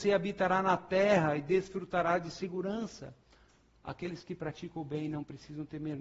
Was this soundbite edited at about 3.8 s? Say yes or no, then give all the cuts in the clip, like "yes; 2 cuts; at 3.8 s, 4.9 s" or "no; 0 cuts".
no; 0 cuts